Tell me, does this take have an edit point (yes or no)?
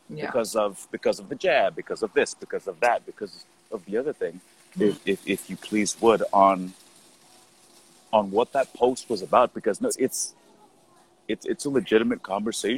yes